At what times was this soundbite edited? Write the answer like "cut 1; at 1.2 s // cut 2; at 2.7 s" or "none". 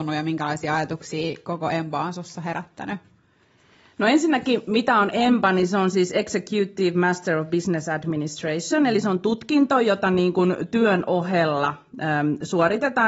none